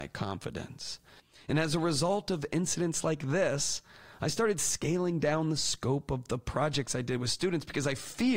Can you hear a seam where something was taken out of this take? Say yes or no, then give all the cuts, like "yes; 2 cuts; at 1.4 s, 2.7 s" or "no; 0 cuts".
no; 0 cuts